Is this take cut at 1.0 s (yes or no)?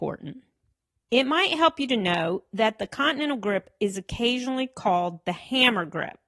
yes